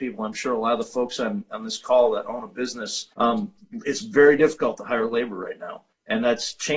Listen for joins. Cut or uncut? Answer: cut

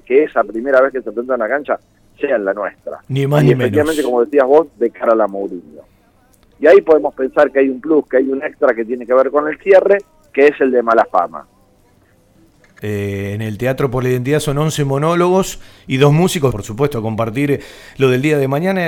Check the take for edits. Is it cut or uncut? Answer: cut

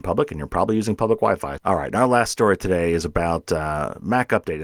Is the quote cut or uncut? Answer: cut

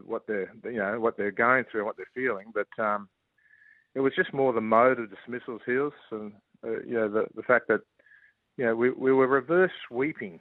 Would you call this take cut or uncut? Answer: uncut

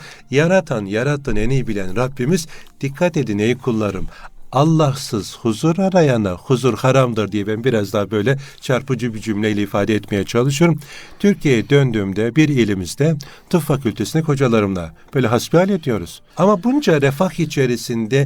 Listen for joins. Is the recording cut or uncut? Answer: cut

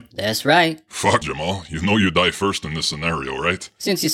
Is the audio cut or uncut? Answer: cut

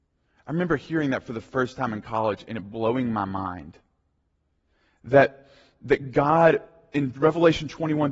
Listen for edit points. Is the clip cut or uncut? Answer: uncut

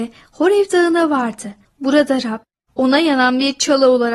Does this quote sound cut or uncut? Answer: uncut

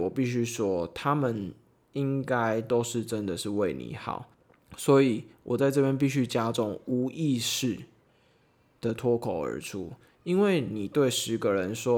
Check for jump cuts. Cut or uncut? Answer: uncut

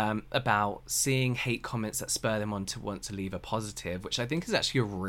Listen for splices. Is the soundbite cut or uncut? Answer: uncut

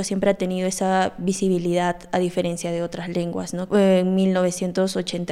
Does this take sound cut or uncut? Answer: cut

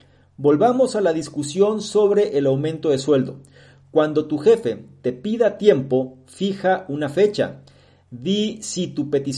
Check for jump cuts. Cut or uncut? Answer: uncut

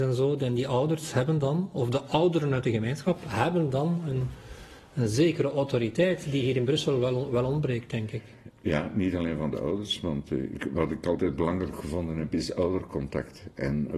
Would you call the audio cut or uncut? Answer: uncut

